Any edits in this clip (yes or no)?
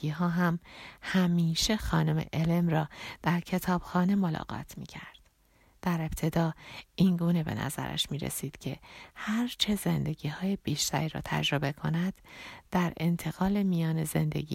no